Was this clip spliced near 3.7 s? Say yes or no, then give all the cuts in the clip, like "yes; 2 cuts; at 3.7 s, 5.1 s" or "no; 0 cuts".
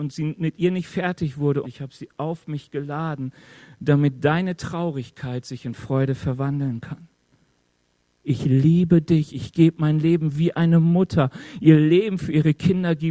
no; 2 cuts; at 1.6 s, 8.2 s